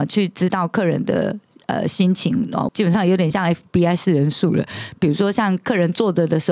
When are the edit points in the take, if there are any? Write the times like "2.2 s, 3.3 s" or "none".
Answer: 2.7 s